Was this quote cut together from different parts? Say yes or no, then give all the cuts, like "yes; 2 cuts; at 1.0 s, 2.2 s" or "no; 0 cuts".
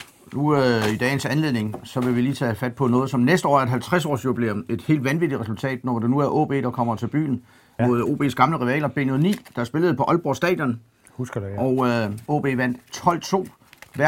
yes; 2 cuts; at 7.8 s, 12.3 s